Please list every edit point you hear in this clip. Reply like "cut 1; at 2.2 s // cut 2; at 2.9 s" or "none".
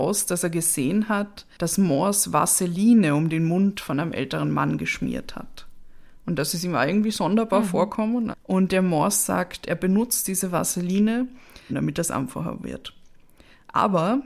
cut 1; at 8.3 s // cut 2; at 11.7 s